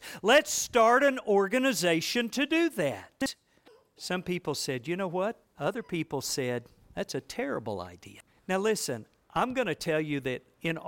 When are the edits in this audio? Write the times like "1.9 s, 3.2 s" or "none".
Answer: 5.4 s, 8.3 s